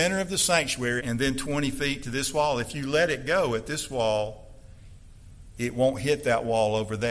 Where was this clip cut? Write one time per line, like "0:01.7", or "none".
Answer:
0:01.0